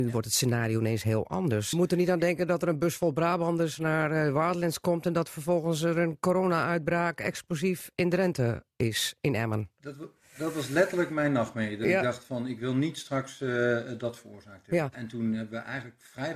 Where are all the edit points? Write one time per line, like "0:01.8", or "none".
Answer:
0:01.7
0:14.9